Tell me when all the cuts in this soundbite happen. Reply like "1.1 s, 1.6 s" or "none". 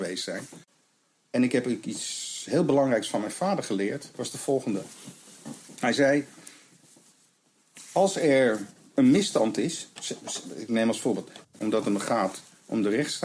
11.4 s